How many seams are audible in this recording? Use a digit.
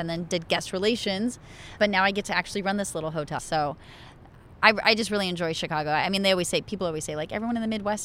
1